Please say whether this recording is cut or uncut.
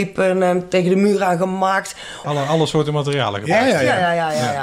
cut